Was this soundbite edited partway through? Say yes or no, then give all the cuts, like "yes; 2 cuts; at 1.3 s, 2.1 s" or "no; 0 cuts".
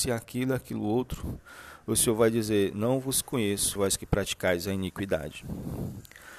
yes; 1 cut; at 3.8 s